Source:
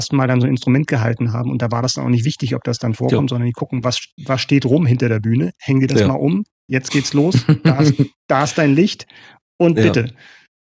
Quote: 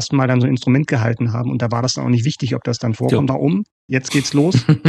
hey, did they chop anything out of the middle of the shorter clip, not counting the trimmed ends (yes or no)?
yes